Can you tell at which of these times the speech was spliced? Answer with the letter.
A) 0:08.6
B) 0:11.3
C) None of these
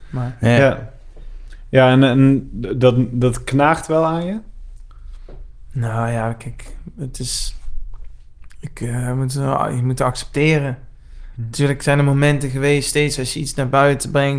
C